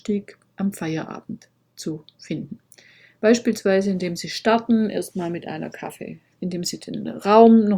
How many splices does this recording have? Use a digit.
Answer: 1